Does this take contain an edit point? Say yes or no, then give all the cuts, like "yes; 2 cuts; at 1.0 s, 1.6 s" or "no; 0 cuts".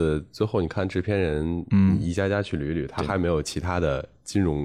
no; 0 cuts